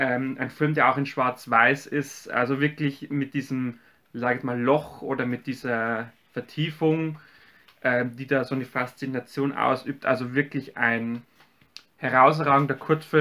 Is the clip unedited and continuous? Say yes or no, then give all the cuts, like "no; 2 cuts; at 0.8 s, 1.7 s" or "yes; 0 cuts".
yes; 0 cuts